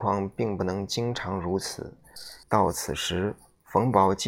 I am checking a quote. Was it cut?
yes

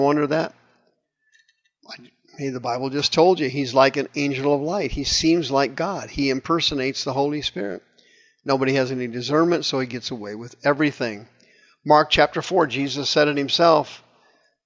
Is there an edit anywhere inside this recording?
no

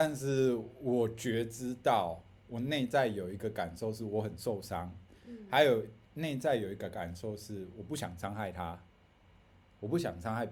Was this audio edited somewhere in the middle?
no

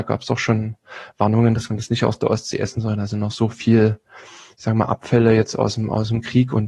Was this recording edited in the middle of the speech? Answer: no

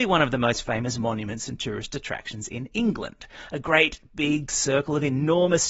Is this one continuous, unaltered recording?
yes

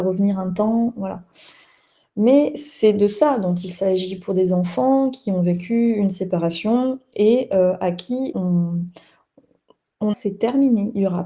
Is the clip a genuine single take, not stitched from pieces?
no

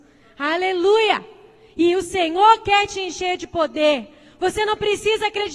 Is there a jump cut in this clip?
no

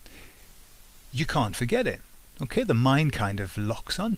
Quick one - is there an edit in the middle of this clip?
no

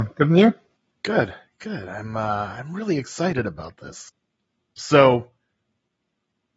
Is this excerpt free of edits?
yes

